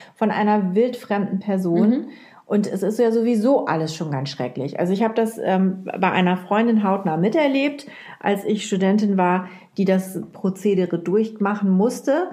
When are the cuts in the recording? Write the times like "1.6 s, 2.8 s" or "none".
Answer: none